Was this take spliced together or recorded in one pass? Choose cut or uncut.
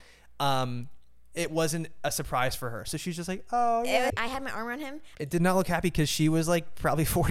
cut